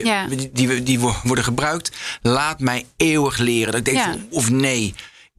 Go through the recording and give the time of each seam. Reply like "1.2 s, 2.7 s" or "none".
4.3 s